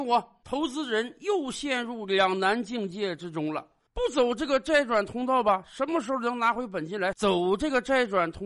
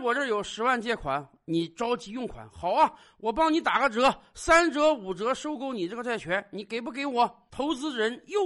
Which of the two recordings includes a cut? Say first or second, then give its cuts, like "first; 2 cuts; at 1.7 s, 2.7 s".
first; 1 cut; at 7.1 s